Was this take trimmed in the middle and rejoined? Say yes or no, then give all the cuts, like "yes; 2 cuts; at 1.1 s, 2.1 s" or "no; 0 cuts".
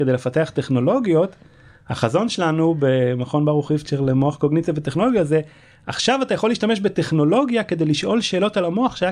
no; 0 cuts